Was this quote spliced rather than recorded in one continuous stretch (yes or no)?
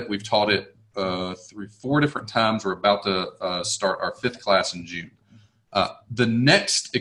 no